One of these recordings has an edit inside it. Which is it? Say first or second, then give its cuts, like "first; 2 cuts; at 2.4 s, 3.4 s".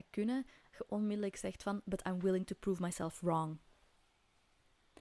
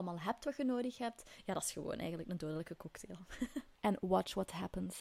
second; 1 cut; at 3.7 s